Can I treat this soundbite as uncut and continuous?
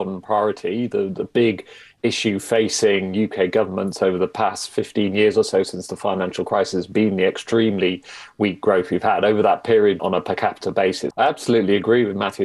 no; 2 cuts; at 10.0 s, 11.1 s

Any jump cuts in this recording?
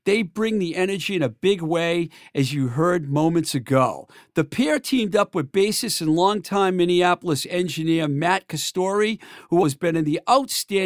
yes; 1 cut; at 9.6 s

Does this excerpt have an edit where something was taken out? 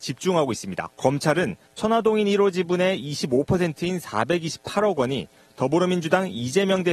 yes; 1 cut; at 0.9 s

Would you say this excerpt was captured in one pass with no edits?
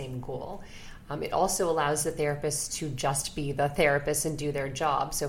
yes; 0 cuts

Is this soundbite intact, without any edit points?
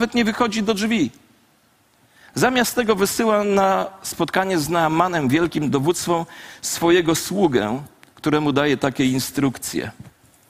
yes; 0 cuts

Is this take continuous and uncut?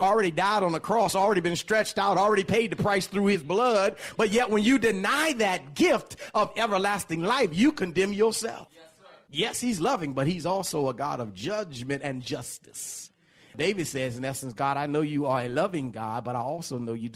yes; 0 cuts

